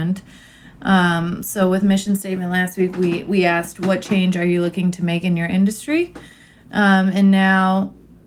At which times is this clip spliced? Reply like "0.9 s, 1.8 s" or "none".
none